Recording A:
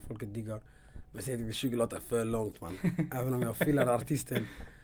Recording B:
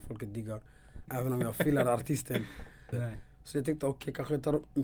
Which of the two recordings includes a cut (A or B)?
B